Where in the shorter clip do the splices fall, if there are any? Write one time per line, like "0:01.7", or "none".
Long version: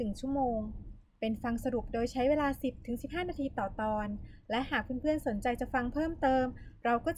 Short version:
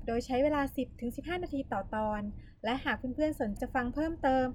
0:03.6